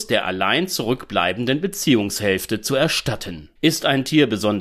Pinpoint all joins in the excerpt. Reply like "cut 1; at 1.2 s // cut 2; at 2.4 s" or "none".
cut 1; at 3.6 s

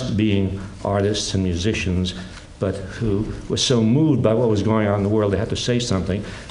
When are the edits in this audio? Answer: none

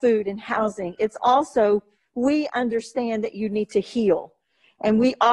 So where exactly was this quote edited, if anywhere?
none

